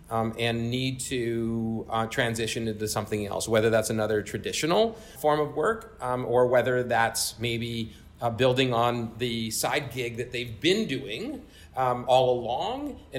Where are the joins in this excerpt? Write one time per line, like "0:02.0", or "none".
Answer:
none